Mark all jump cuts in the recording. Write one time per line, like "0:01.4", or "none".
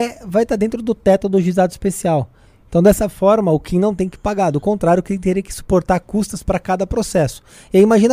none